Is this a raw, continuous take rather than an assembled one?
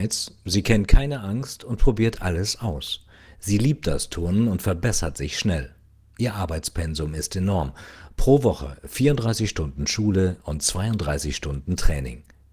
yes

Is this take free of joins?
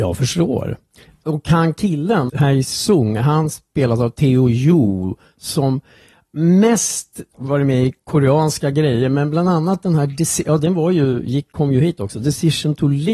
yes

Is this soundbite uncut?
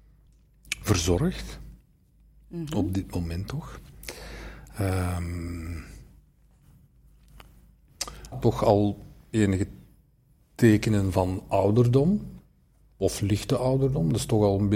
no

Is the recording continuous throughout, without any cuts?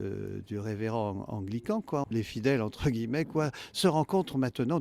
no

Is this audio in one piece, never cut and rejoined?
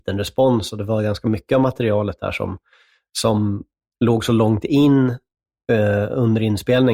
yes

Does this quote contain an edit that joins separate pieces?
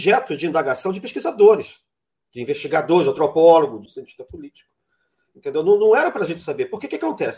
yes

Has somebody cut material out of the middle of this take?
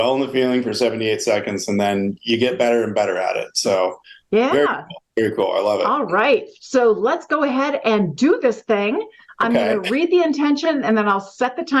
no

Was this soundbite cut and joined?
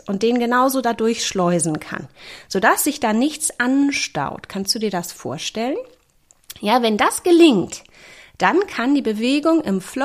no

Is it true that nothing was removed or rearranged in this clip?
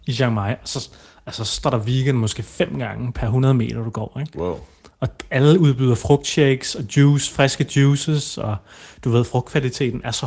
yes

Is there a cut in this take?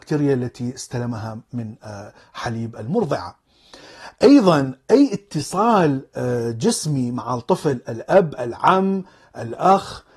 no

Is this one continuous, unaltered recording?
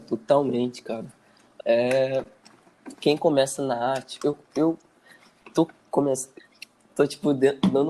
yes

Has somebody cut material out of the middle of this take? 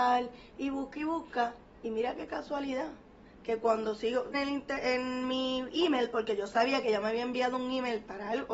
yes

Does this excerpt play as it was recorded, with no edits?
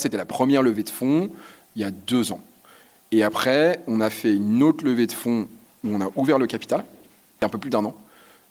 yes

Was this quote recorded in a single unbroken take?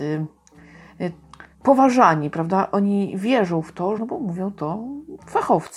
no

